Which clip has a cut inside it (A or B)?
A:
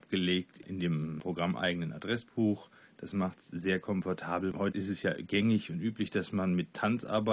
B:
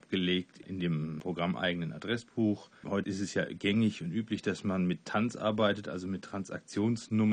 B